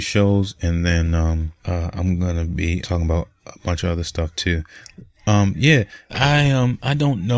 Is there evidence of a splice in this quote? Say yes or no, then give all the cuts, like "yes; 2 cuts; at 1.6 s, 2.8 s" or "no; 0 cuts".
yes; 3 cuts; at 1.6 s, 2.8 s, 6.1 s